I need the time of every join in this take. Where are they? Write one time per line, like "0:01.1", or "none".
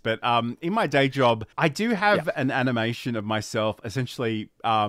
0:01.5

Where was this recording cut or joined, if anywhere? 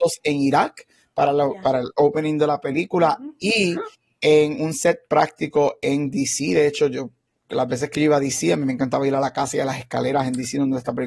none

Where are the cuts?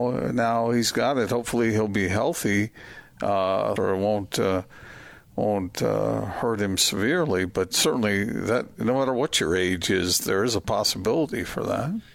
0:03.8

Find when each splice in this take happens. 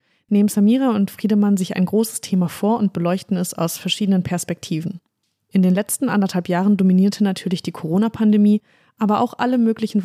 none

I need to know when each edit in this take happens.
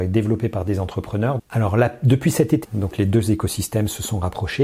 0:01.4
0:02.6

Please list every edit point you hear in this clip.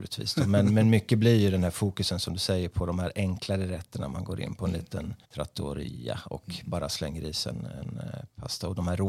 0:05.2

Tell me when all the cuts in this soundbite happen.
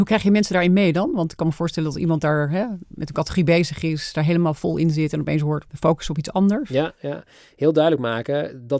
0:05.7

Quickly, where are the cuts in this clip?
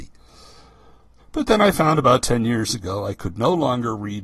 0:01.2

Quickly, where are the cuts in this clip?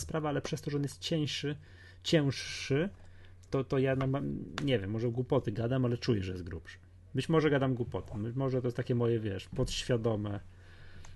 none

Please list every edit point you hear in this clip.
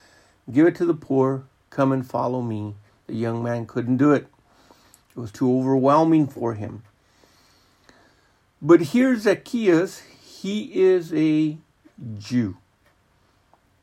none

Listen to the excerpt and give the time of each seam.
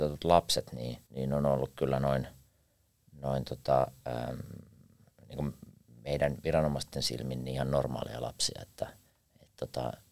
0:01.1

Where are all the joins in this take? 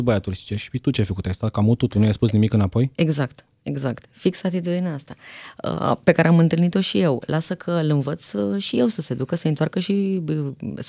none

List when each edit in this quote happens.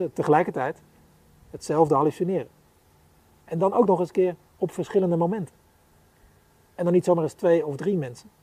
none

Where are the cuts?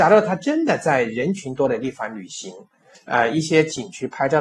0:02.9

